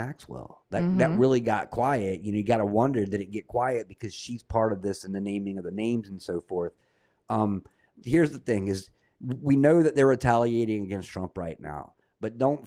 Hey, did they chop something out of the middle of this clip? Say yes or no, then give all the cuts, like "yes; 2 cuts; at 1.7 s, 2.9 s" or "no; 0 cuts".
yes; 1 cut; at 8.0 s